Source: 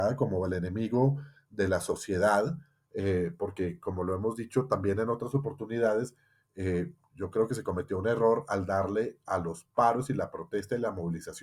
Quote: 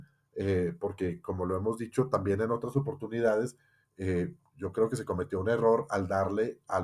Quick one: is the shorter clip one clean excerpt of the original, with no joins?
yes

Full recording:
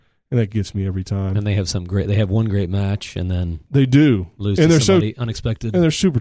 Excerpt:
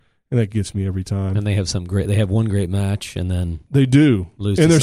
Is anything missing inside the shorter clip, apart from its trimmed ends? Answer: no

